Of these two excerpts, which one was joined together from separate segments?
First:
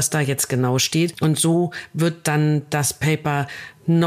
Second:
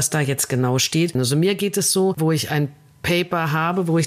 second; 2 cuts; at 1.1 s, 2.2 s

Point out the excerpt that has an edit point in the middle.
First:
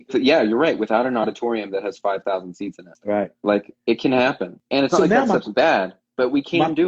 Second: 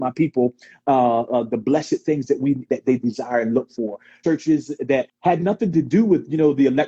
second; 2 cuts; at 2.7 s, 4.2 s

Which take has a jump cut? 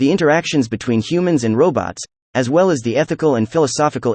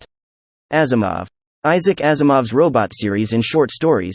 second; 1 cut; at 1.5 s

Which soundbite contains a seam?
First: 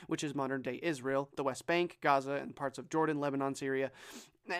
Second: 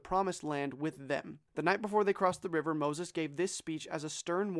second; 1 cut; at 1.5 s

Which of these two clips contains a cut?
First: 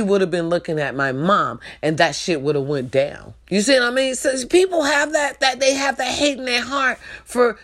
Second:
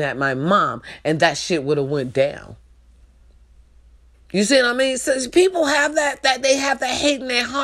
first; 1 cut; at 3.4 s

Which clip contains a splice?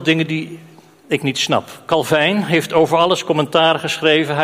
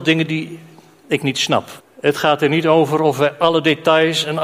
second; 1 cut; at 1.8 s

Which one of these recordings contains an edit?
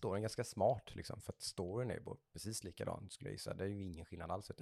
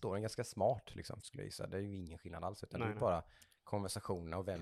second; 1 cut; at 1.2 s

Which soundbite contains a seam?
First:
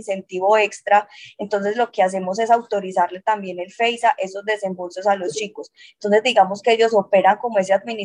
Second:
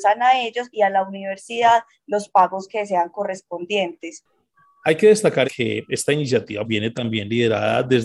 second; 2 cuts; at 5.4 s, 6.6 s

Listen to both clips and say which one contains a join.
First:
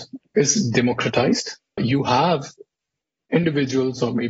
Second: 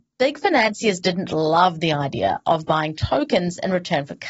first; 1 cut; at 1.8 s

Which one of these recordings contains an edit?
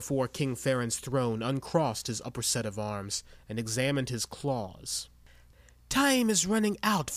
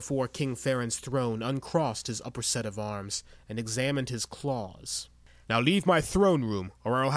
second; 1 cut; at 5.4 s

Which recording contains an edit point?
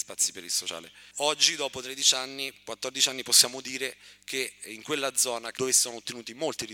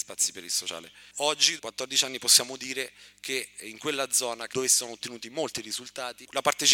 second; 1 cut; at 1.6 s

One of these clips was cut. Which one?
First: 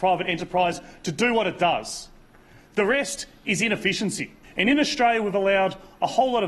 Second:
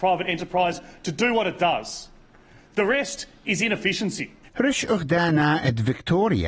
second; 1 cut; at 4.5 s

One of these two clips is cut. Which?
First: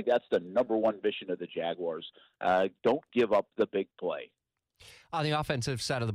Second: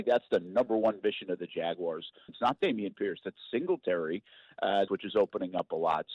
second; 2 cuts; at 2.3 s, 4.9 s

